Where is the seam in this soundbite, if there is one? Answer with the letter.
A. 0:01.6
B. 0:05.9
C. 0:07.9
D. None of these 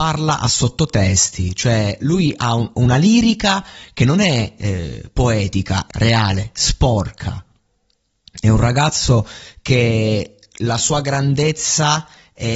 B